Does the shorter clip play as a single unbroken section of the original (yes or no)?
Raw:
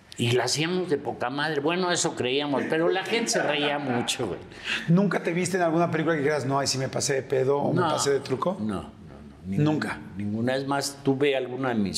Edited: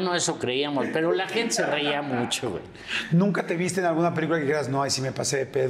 yes